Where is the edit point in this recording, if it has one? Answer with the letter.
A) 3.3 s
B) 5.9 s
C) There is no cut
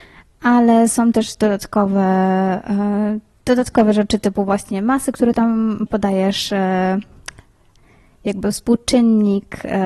B